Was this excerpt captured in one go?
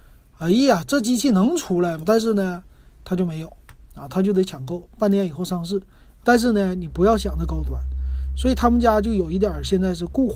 no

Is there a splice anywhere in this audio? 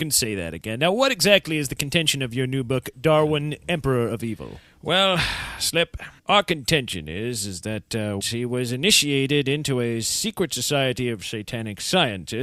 yes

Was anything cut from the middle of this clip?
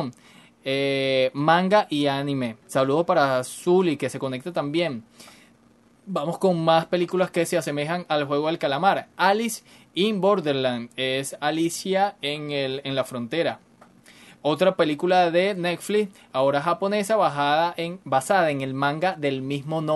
yes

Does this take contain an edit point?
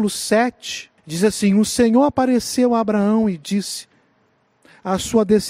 yes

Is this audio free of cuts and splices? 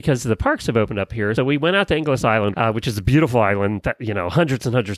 no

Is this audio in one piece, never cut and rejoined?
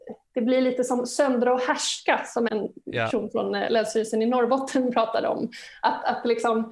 no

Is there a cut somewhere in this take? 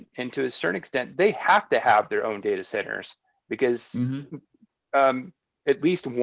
no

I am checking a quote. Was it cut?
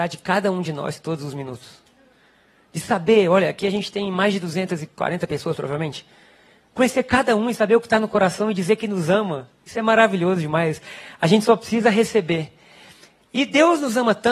no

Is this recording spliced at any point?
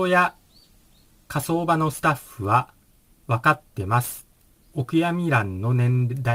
yes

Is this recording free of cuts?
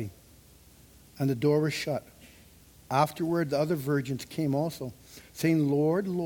yes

